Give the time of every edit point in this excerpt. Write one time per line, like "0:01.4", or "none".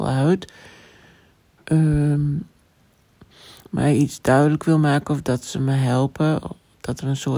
none